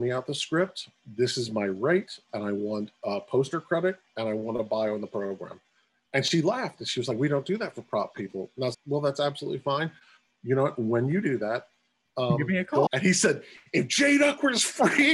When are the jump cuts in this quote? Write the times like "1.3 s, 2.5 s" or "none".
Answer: 8.7 s, 11.2 s, 12.9 s